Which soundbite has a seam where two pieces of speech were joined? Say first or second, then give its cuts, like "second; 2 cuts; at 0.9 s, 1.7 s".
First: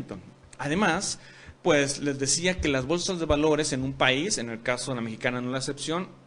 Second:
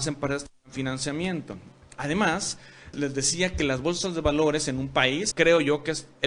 second; 2 cuts; at 2.9 s, 5.3 s